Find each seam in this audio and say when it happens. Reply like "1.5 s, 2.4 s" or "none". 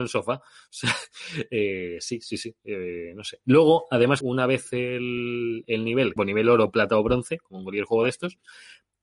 4.2 s, 6.2 s